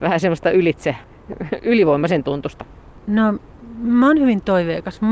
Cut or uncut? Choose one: uncut